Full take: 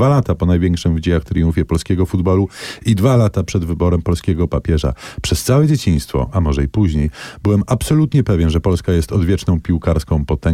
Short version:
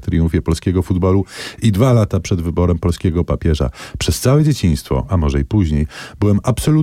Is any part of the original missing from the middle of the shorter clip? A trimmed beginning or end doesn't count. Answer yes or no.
no